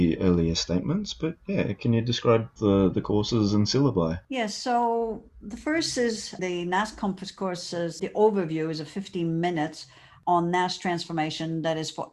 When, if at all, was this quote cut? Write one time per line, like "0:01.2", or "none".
0:04.2
0:06.4

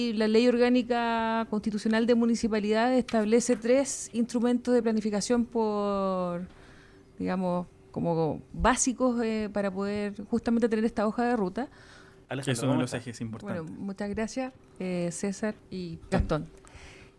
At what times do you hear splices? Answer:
0:12.2
0:16.1

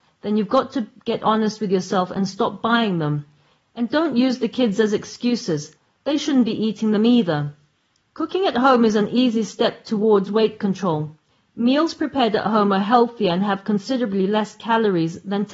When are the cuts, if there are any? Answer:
0:08.0

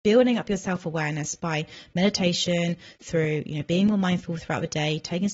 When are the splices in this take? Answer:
none

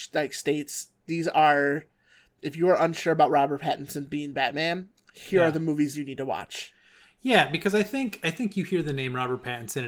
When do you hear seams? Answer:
none

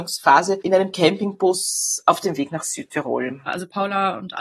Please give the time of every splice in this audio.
0:03.5

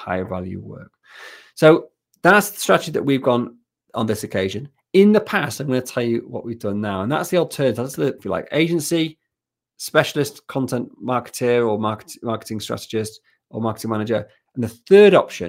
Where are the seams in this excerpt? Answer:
0:08.2

